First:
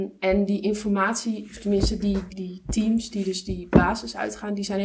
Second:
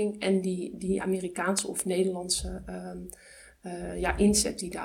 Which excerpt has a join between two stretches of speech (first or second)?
first